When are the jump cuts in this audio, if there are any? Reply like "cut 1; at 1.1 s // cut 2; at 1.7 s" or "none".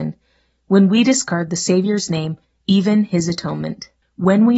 cut 1; at 2.4 s